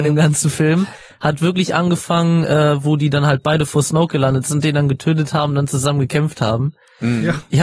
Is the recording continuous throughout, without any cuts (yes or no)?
yes